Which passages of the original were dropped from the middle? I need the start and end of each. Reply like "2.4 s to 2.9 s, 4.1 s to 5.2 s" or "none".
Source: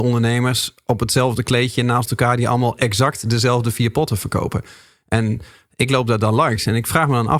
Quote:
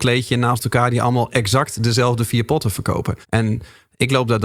4.7 s to 5.0 s